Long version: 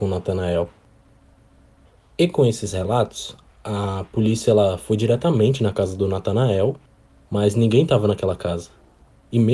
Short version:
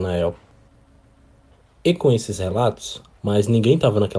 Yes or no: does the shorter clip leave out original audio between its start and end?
yes